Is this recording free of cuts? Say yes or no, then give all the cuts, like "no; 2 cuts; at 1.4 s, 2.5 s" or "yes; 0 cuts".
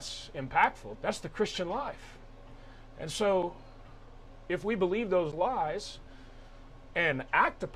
no; 1 cut; at 0.9 s